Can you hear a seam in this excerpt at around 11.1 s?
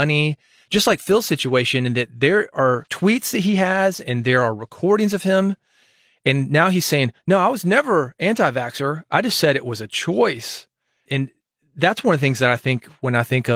yes; 1 cut; at 11.1 s

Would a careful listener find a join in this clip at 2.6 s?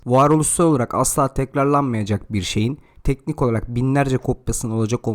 no; 0 cuts

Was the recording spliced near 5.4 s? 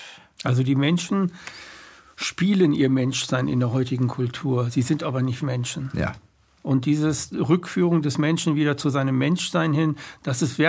yes; 1 cut; at 5.4 s

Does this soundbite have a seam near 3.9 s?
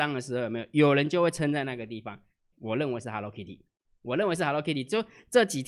no; 1 cut; at 2.5 s

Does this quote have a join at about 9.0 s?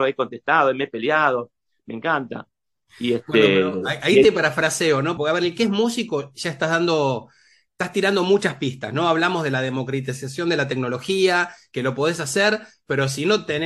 no; 1 cut; at 5.2 s

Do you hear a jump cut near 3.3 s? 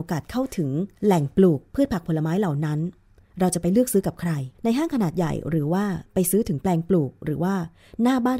no; 2 cuts; at 1.0 s, 4.5 s

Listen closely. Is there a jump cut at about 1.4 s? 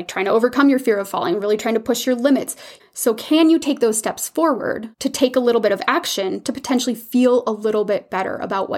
no; 2 cuts; at 2.8 s, 4.9 s

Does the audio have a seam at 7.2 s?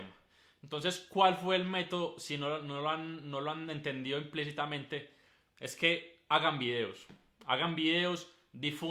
no; 0 cuts

